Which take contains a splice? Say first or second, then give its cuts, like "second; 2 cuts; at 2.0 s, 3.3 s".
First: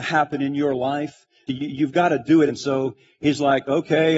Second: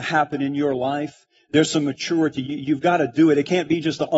first; 2 cuts; at 1.5 s, 2.5 s